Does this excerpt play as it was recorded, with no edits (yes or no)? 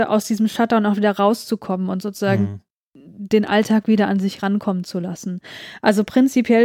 yes